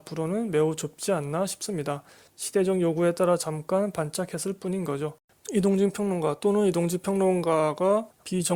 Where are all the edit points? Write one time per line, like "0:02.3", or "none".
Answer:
0:05.3